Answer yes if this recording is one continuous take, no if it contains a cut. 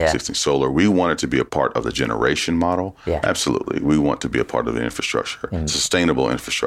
no